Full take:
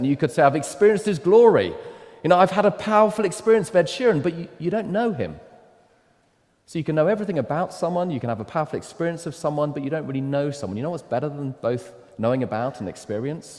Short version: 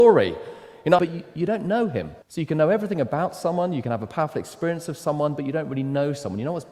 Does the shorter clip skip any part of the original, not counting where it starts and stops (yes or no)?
yes